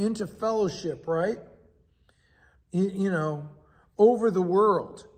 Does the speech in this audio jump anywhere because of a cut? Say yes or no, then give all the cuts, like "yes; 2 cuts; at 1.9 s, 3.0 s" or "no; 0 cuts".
no; 0 cuts